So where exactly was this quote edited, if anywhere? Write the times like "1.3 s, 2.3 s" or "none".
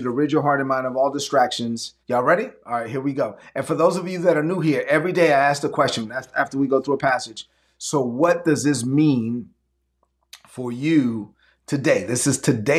2.0 s